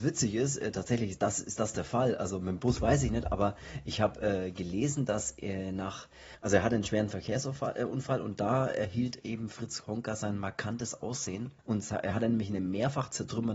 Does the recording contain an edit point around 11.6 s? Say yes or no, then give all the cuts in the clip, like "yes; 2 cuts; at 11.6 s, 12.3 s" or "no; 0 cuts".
yes; 1 cut; at 11.6 s